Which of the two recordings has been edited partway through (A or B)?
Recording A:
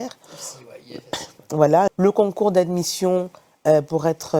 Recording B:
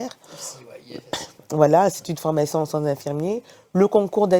A